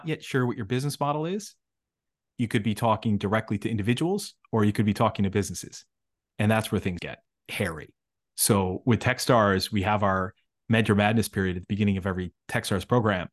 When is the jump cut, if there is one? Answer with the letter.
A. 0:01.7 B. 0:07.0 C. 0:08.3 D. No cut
B